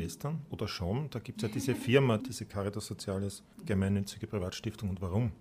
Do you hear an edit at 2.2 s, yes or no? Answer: yes